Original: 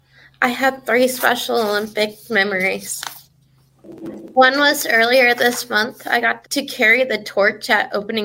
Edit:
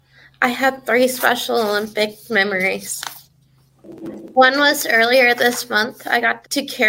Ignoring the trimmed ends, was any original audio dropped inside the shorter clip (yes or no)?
no